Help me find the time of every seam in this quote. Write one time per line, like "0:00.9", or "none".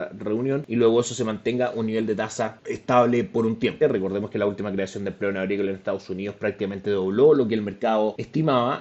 0:03.8

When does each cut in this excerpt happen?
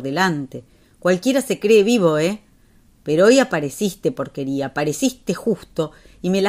none

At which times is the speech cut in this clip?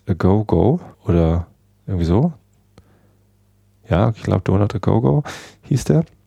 0:00.9

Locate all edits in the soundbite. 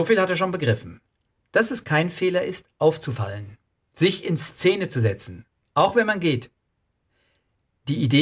none

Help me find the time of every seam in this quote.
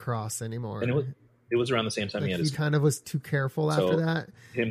0:02.5

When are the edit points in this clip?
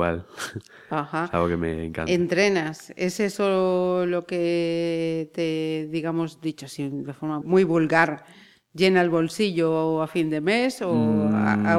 0:07.4

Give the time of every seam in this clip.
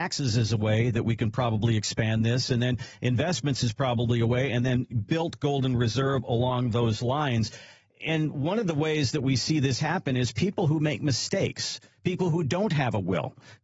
none

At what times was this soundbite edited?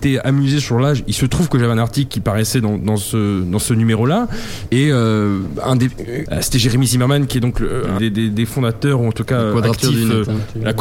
0:04.7
0:06.3
0:08.0

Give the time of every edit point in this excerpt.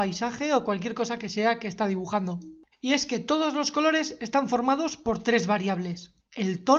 0:02.7

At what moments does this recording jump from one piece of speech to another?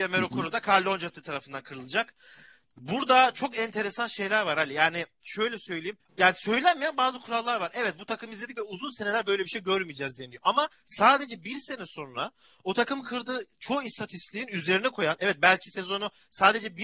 0:06.0

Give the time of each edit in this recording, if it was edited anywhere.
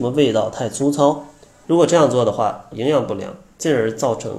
0:01.6
0:02.7

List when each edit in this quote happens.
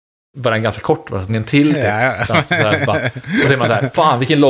0:01.3

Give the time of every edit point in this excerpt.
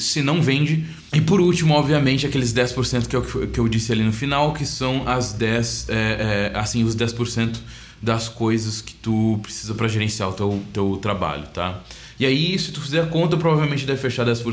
0:01.1

